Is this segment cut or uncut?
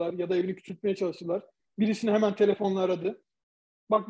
uncut